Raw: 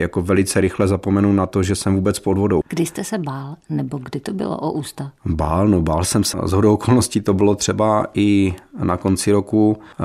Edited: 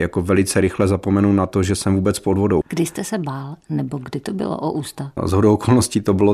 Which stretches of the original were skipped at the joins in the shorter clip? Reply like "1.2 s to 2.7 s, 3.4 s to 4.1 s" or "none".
5.2 s to 6.4 s